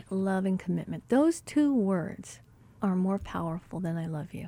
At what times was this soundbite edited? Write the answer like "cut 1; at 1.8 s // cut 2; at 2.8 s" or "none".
cut 1; at 2.8 s